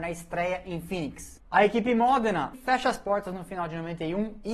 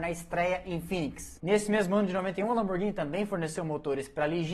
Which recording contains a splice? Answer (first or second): first